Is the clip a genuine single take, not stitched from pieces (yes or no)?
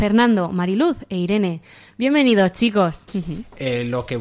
no